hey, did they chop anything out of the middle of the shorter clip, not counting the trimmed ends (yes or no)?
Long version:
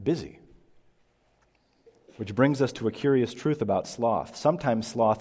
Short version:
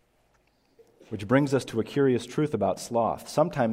no